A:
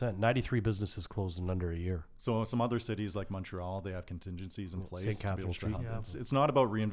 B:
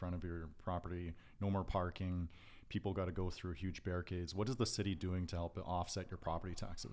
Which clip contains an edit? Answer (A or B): A